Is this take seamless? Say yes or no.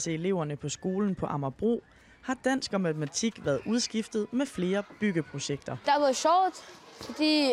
yes